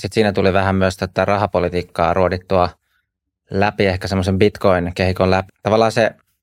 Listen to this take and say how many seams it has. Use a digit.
1